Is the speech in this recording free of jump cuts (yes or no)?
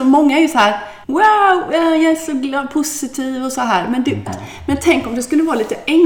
no